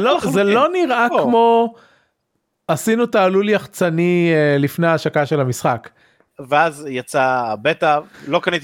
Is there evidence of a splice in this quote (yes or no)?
yes